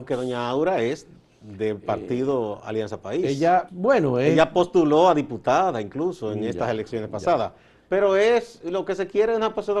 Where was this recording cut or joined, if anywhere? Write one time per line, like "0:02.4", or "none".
0:03.7

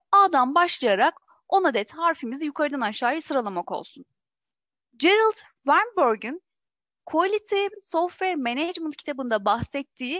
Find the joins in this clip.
0:04.8

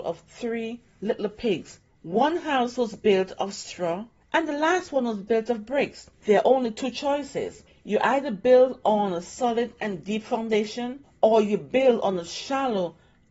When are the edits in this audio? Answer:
0:04.2
0:06.1

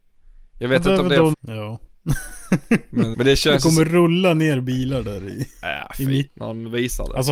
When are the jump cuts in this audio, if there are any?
0:01.3
0:03.1
0:06.3

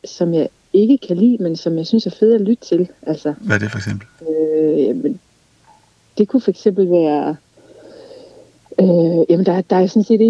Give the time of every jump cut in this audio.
none

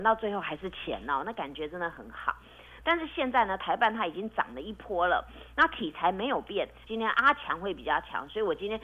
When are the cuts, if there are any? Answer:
0:02.8
0:06.8

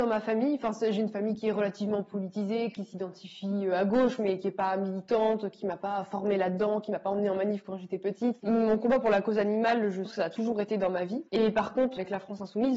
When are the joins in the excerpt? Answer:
0:08.4
0:10.1
0:11.3

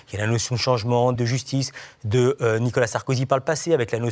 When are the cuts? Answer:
0:01.1

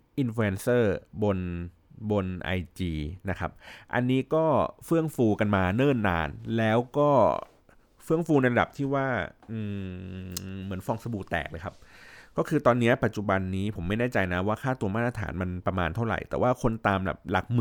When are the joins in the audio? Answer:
none

